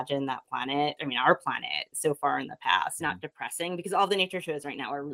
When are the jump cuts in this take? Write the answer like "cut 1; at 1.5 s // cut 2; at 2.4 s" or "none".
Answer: cut 1; at 1.0 s // cut 2; at 3.0 s